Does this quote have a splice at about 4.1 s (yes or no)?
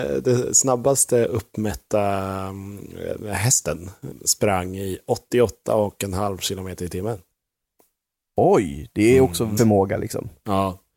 yes